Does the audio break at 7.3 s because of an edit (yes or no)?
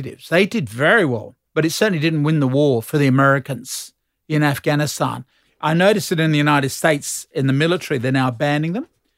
no